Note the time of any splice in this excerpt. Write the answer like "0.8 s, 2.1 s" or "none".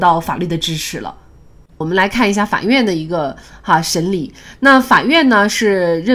1.7 s